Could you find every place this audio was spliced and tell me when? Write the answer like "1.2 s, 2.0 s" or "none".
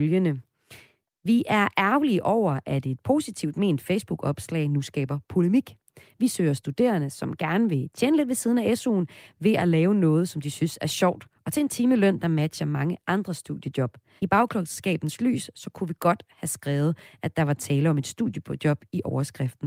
14.2 s